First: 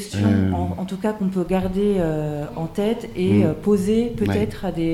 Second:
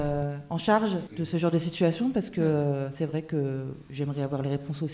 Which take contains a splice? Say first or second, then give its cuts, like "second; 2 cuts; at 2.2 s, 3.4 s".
second; 1 cut; at 1.1 s